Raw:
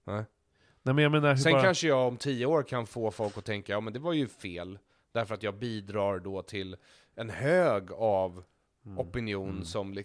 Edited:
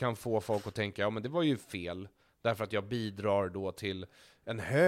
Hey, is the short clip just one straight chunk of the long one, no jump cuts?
yes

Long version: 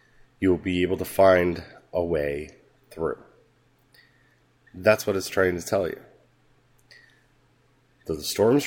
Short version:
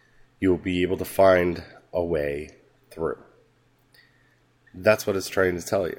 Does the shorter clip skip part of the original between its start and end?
no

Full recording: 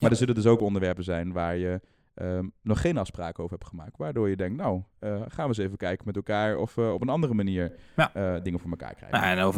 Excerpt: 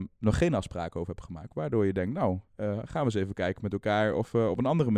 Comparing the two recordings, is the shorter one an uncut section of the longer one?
yes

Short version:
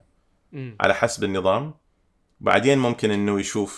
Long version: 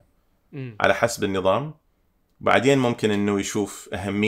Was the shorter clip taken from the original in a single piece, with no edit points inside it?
yes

